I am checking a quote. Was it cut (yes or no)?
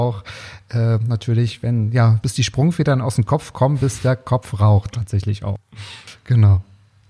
yes